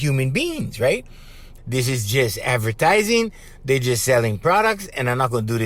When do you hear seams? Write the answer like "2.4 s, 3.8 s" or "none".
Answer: 1.6 s